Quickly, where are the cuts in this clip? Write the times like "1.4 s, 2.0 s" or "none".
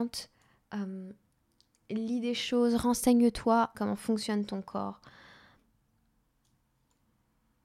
3.7 s